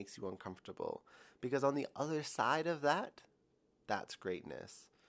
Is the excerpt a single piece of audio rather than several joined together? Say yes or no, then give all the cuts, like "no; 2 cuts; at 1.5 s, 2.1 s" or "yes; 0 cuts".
yes; 0 cuts